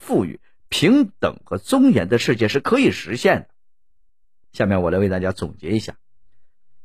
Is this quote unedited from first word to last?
no; 1 cut; at 4.4 s

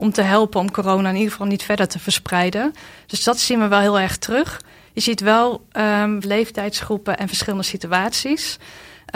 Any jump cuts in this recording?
yes; 1 cut; at 6.2 s

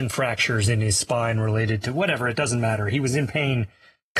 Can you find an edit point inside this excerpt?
no; 0 cuts

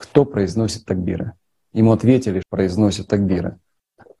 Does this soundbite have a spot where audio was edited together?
yes; 1 cut; at 2.4 s

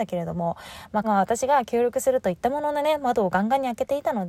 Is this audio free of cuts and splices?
no; 1 cut; at 1.0 s

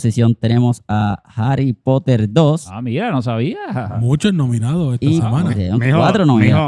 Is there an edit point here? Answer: no; 0 cuts

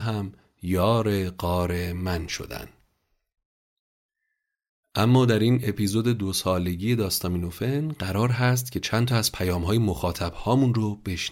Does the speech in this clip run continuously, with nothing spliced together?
yes; 0 cuts

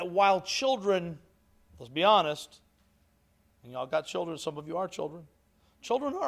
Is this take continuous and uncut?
yes; 0 cuts

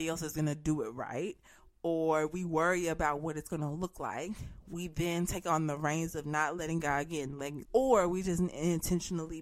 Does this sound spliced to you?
yes; 1 cut; at 7.6 s

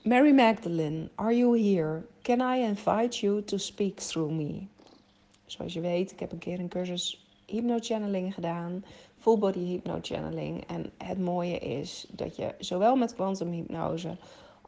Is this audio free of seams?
yes; 0 cuts

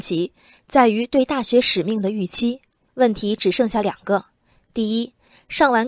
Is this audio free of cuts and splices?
no; 1 cut; at 2.9 s

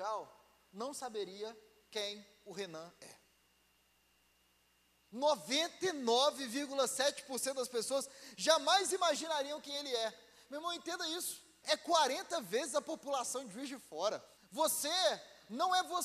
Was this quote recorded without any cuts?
no; 2 cuts; at 11.6 s, 14.4 s

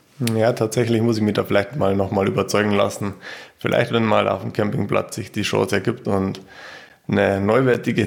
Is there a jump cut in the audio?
no; 0 cuts

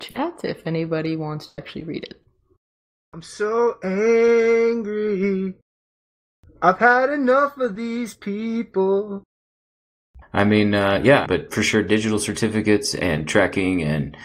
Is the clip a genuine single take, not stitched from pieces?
no; 2 cuts; at 10.2 s, 11.3 s

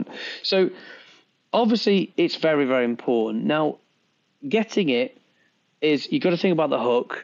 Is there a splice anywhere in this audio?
no; 0 cuts

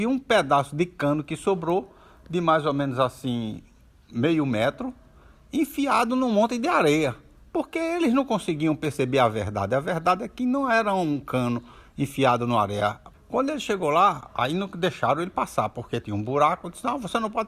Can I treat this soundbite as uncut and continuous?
no; 2 cuts; at 13.1 s, 16.0 s

